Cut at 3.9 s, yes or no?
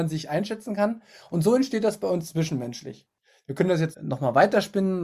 yes